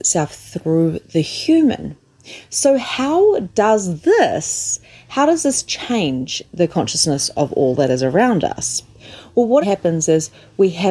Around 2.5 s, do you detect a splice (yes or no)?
no